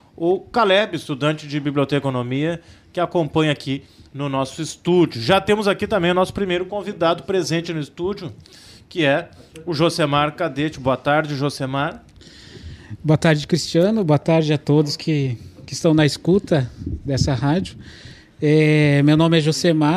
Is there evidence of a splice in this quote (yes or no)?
no